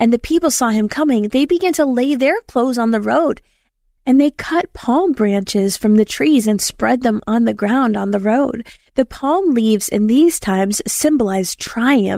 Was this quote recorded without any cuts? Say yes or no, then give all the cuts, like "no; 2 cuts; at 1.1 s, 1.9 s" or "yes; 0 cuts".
yes; 0 cuts